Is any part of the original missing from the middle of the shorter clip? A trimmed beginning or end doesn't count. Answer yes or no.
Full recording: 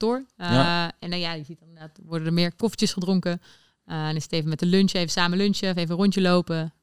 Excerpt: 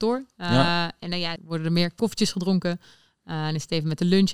yes